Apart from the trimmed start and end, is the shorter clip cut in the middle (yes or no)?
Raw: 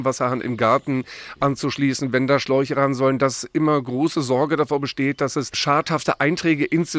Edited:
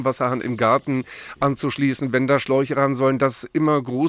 no